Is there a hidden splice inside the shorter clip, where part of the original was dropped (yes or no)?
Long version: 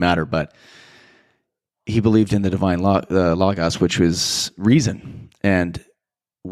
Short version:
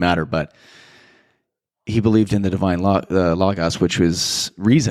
no